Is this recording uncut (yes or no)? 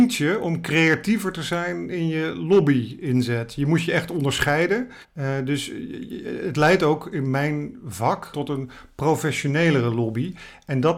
no